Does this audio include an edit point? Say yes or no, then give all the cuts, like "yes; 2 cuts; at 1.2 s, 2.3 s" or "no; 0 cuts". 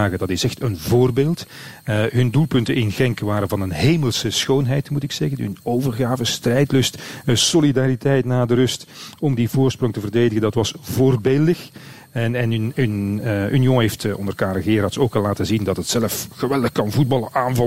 no; 0 cuts